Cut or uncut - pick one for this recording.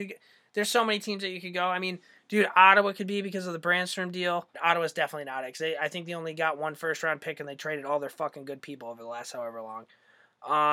cut